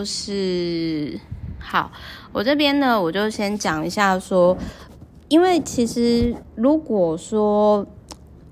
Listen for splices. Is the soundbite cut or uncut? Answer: uncut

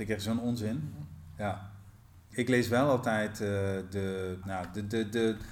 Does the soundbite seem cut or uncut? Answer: cut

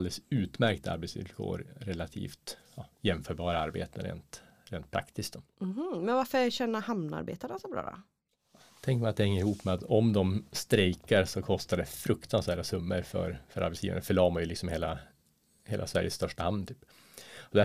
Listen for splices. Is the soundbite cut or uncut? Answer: uncut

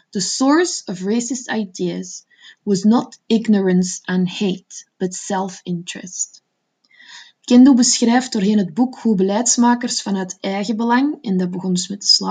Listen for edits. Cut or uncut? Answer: uncut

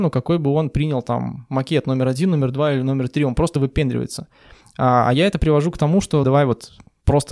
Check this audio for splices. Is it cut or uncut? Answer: cut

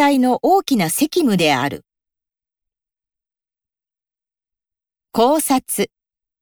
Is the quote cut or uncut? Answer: uncut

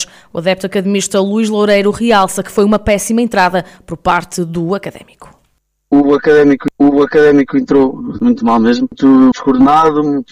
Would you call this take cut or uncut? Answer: cut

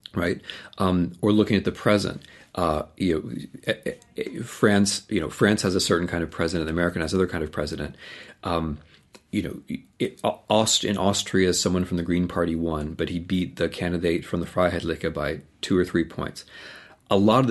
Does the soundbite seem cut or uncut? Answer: uncut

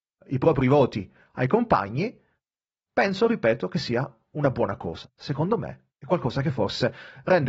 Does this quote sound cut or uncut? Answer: uncut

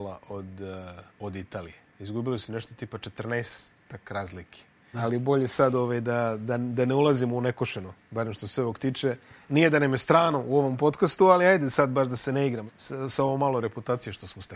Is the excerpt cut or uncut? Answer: cut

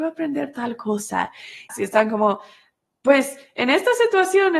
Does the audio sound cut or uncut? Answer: cut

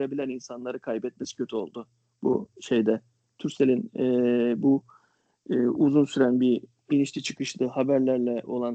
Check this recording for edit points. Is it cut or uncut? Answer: uncut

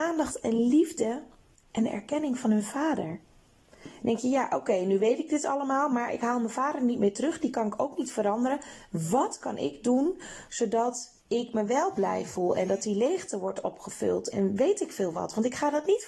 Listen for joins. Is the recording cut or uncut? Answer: cut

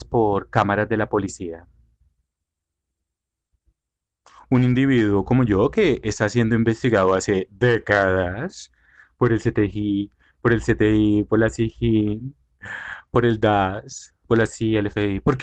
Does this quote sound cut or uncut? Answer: uncut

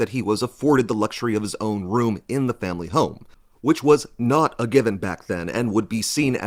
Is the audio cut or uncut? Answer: uncut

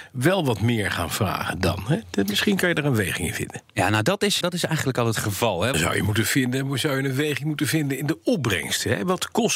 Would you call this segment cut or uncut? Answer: cut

